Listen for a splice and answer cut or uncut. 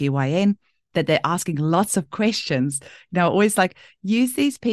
uncut